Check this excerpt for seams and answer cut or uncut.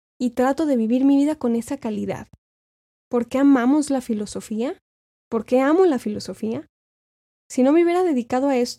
uncut